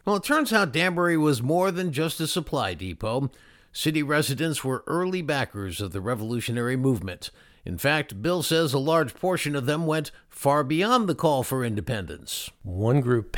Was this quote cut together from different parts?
no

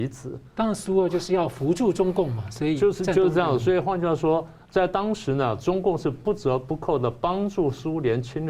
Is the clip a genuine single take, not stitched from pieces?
yes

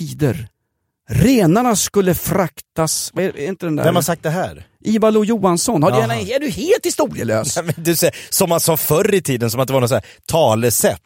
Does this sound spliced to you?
no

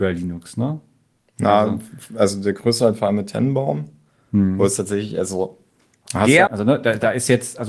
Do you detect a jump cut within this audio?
yes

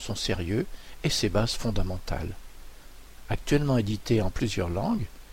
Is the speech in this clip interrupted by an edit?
no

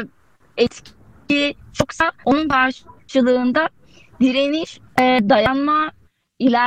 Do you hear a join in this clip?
yes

